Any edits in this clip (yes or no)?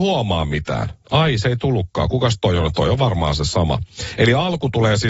no